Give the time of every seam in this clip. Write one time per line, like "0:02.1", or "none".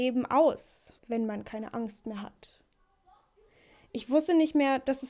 0:01.0